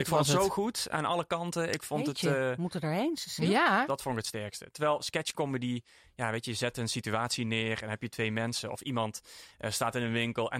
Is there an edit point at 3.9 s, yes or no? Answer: yes